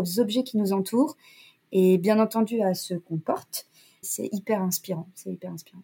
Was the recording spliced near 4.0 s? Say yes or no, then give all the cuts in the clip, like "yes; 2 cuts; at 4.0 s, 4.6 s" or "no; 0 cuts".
yes; 1 cut; at 4.0 s